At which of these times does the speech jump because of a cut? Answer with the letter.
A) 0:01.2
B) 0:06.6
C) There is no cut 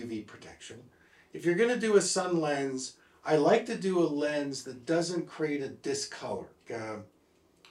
B